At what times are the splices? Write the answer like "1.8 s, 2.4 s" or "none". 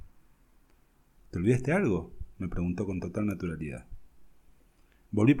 1.2 s